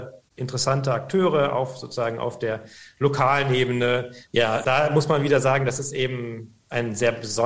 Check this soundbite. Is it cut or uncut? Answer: cut